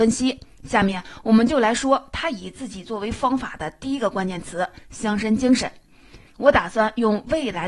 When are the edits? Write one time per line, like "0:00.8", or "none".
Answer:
0:06.3